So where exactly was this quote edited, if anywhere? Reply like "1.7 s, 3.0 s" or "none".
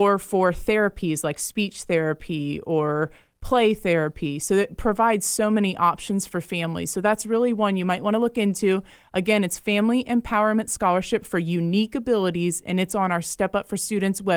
none